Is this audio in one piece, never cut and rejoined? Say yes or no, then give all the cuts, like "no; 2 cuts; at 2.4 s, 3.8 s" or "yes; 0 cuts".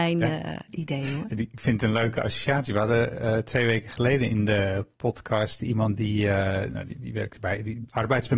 yes; 0 cuts